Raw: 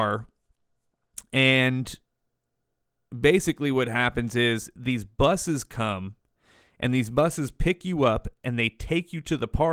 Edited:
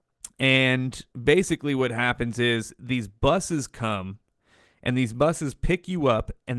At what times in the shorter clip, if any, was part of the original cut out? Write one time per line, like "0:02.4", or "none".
0:01.1